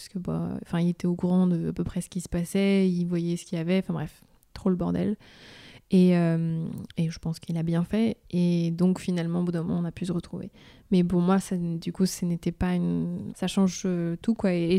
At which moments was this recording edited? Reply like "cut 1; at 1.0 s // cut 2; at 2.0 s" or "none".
cut 1; at 13.3 s

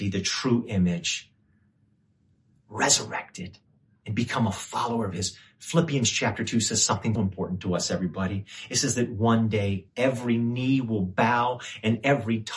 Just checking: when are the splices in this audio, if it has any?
cut 1; at 7.2 s

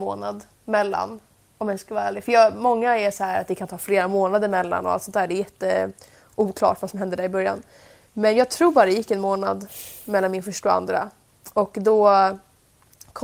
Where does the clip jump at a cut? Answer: none

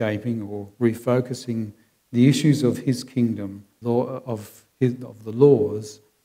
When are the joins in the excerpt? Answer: cut 1; at 3.8 s

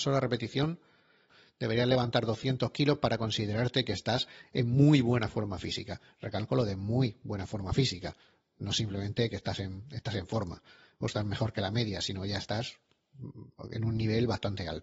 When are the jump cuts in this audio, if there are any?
none

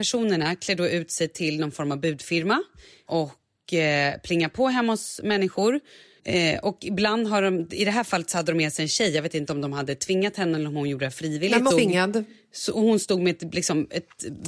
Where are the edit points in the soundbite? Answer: cut 1; at 6.2 s // cut 2; at 11.7 s

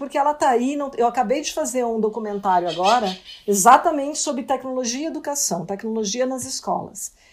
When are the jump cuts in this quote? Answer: none

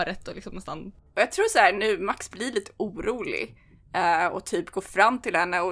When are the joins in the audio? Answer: none

